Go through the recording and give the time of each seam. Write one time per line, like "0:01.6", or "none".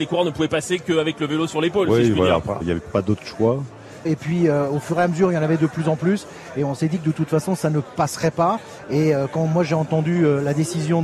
0:02.6
0:04.0